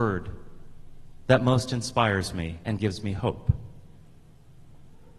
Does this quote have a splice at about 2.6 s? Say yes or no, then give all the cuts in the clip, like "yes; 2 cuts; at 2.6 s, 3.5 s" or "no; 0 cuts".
yes; 1 cut; at 2.6 s